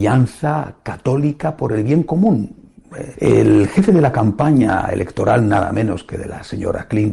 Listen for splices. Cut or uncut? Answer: cut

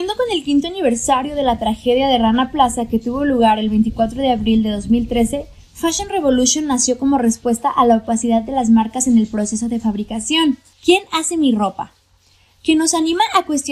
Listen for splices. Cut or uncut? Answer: cut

